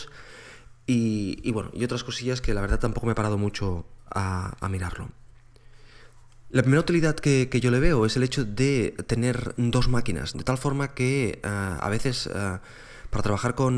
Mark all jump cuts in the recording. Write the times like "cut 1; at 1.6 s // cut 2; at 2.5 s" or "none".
cut 1; at 6.5 s // cut 2; at 10.3 s